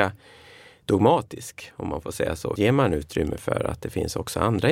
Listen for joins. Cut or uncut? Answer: cut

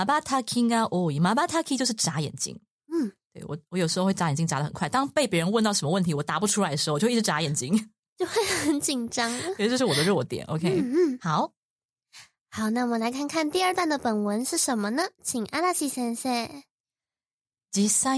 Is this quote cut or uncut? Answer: uncut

